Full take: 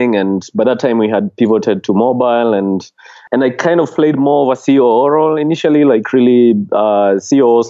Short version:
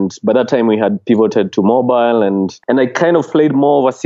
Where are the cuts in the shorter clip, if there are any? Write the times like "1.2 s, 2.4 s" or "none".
2.6 s